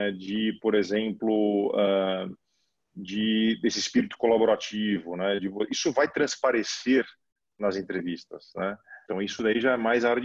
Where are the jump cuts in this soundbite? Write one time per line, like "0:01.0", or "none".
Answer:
0:09.1